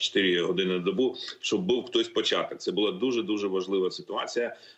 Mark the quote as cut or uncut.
uncut